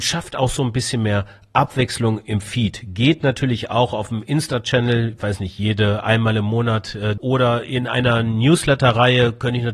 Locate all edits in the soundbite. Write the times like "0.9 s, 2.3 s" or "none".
7.2 s